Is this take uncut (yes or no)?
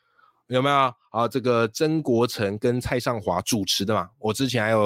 yes